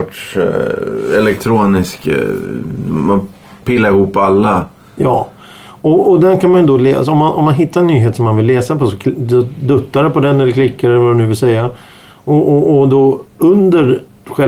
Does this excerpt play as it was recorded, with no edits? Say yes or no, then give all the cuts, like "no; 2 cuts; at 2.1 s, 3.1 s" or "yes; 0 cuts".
yes; 0 cuts